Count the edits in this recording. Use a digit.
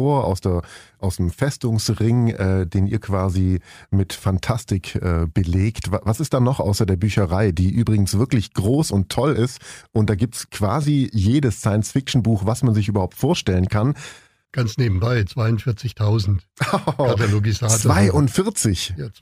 1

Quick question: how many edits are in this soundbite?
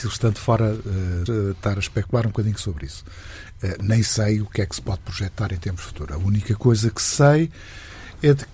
1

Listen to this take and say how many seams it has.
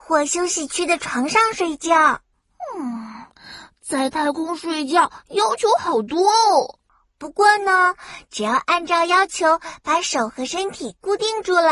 0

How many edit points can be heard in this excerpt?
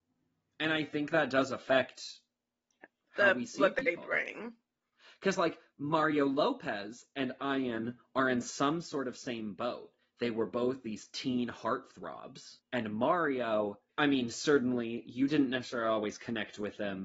2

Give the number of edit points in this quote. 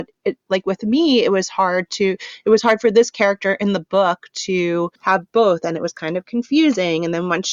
1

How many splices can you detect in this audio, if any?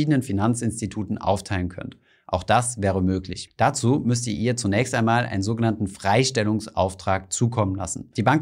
1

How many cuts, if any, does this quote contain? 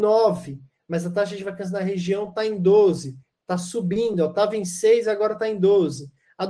0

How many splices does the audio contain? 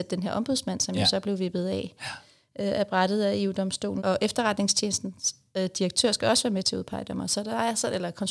1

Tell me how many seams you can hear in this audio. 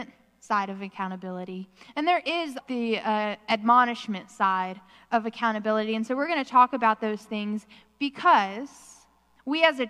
1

